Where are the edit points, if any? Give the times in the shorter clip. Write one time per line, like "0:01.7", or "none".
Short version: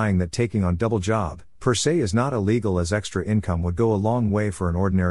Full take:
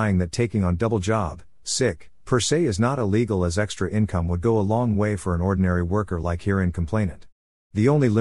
0:01.6